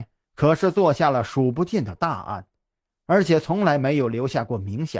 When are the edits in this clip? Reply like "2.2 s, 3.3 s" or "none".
none